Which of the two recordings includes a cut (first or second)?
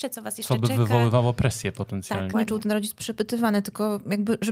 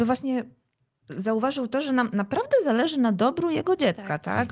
first